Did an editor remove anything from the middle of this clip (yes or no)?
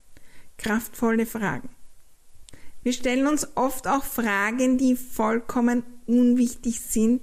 yes